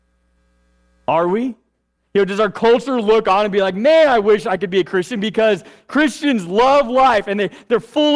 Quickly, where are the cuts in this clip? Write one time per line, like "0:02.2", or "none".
0:02.0